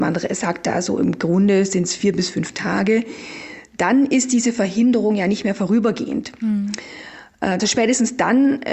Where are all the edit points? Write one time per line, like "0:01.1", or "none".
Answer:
0:07.6